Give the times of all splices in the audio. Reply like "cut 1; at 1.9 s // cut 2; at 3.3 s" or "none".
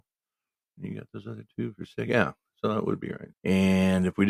cut 1; at 3.3 s

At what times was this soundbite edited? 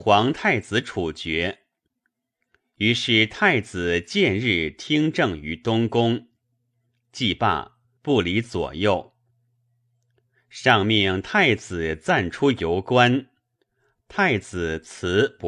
cut 1; at 8.0 s

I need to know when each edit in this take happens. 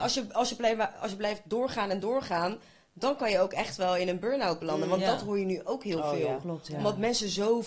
none

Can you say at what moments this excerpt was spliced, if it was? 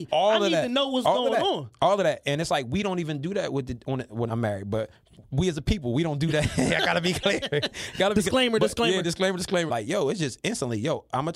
cut 1; at 4.3 s // cut 2; at 9.7 s

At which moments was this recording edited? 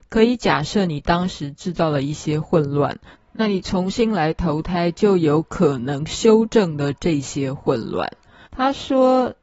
cut 1; at 8.5 s

